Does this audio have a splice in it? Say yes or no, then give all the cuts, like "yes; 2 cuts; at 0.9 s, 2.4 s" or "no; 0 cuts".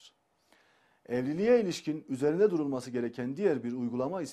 no; 0 cuts